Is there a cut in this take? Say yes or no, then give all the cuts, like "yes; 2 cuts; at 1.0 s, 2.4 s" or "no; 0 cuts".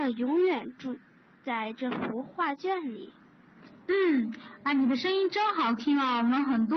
no; 0 cuts